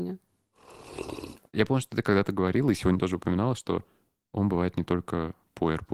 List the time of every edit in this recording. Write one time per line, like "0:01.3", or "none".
none